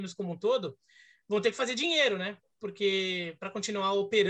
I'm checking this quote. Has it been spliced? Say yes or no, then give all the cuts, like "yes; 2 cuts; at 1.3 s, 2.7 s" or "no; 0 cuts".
no; 0 cuts